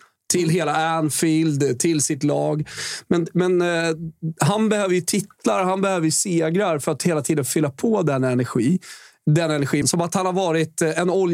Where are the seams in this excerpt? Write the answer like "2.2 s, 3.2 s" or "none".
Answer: 9.8 s